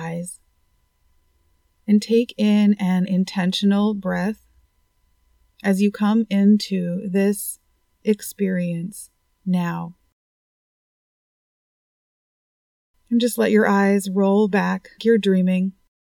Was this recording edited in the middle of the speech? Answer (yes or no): yes